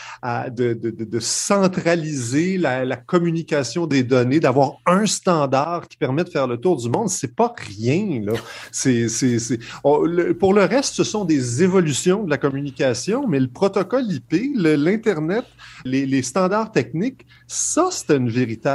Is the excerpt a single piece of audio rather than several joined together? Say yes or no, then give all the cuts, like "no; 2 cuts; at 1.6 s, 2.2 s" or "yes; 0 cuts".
no; 1 cut; at 15.9 s